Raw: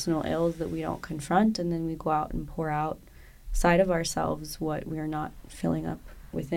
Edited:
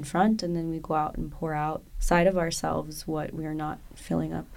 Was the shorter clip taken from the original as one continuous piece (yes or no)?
no